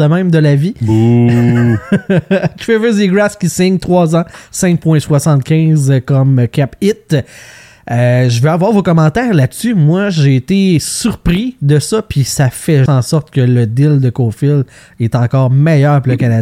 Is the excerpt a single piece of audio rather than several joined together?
no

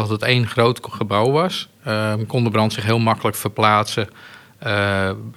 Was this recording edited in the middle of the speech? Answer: no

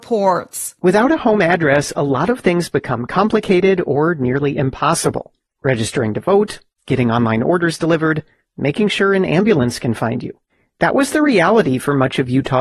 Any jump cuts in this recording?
no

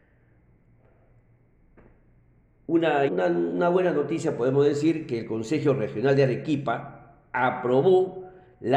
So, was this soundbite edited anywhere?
yes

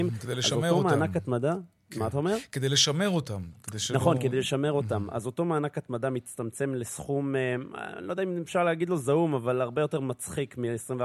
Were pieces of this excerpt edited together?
no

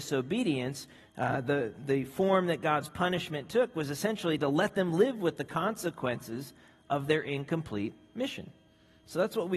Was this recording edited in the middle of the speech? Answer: no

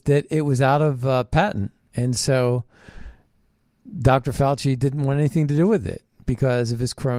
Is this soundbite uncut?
yes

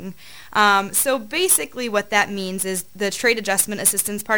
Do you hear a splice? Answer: no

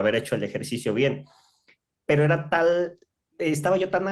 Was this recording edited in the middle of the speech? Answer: no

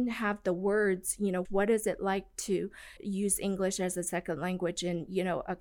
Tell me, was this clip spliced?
yes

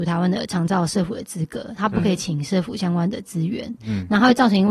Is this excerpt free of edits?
yes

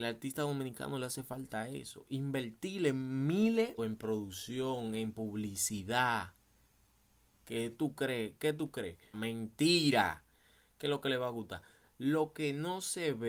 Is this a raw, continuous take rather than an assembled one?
no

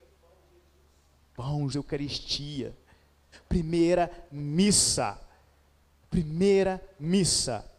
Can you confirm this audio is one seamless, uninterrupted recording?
no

